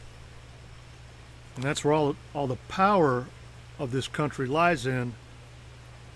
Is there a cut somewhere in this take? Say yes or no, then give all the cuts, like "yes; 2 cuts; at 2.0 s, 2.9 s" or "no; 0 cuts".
yes; 1 cut; at 1.5 s